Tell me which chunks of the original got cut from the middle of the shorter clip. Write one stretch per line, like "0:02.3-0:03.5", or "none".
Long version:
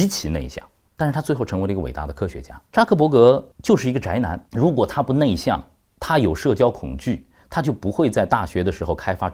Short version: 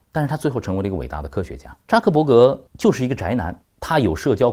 0:04.5-0:05.8